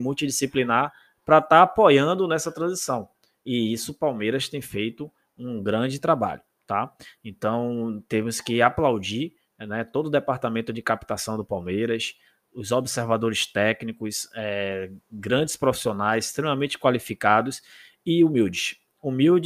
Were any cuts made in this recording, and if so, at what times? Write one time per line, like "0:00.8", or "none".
none